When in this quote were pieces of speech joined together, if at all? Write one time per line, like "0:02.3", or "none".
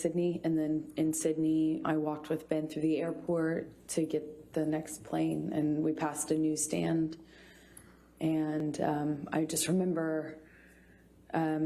0:01.8

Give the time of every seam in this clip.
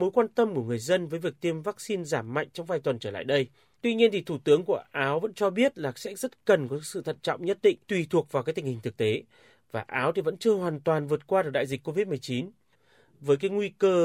0:03.7
0:07.8

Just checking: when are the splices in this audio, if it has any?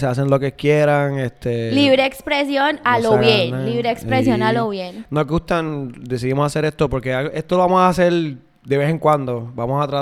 none

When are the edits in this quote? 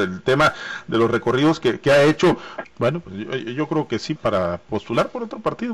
0:02.6
0:04.2

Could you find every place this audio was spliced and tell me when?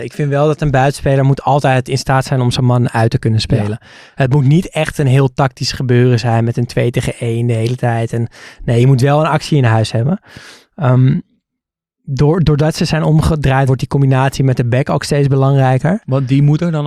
0:13.7

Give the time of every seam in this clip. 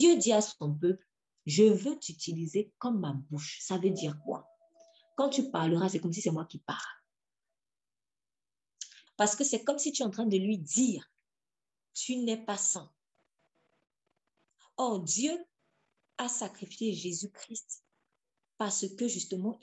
0:09.1

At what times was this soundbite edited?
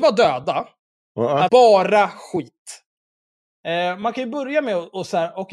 0:01.5

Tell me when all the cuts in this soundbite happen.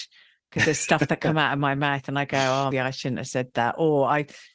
0:02.7

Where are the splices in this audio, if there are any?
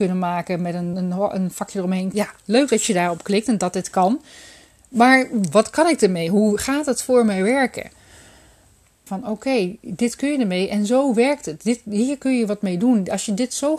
0:00.9
0:02.1
0:09.1

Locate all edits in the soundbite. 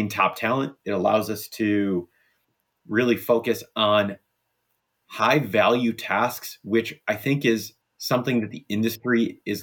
0:07.8

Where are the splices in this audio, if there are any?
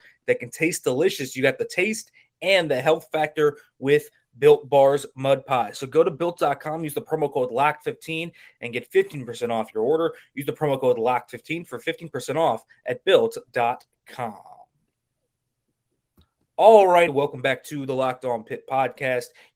0:17.1

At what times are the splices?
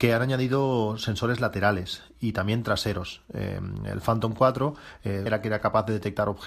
0:05.3

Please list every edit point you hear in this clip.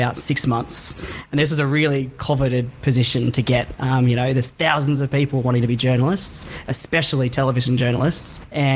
none

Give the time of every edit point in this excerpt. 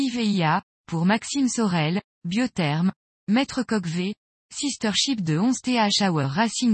0:03.1

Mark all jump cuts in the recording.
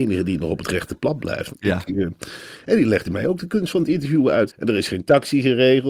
0:01.5
0:04.5

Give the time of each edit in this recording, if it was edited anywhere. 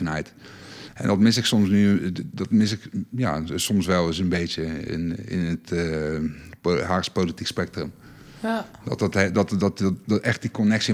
none

